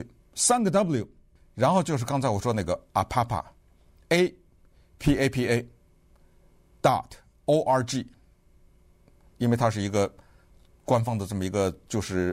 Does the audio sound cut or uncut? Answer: uncut